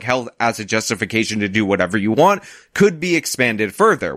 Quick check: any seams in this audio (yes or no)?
no